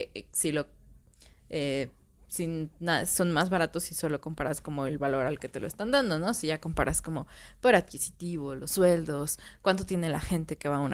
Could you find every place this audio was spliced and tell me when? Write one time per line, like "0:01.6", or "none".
none